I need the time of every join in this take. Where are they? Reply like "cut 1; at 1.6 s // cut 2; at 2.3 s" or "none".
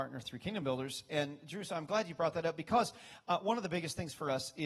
none